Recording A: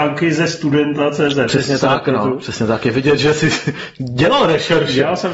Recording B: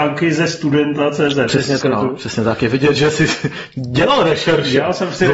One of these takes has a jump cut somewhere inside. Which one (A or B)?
B